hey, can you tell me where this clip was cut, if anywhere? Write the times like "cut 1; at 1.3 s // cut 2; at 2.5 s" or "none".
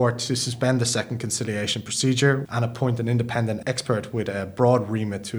cut 1; at 2.5 s

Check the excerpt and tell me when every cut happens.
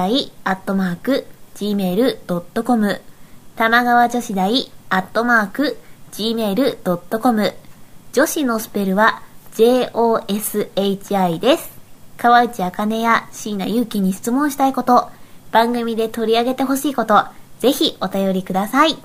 cut 1; at 12.1 s

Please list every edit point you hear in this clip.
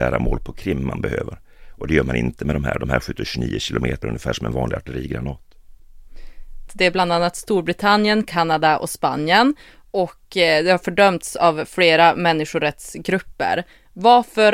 cut 1; at 4.0 s // cut 2; at 6.7 s

